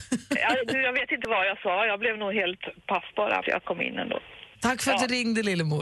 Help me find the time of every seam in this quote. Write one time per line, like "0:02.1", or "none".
0:03.4
0:04.5